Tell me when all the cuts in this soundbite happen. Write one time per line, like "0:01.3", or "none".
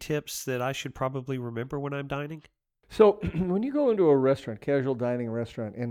none